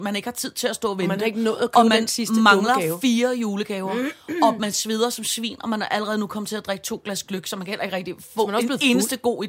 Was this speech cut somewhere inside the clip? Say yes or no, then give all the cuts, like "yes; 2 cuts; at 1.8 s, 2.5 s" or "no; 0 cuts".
no; 0 cuts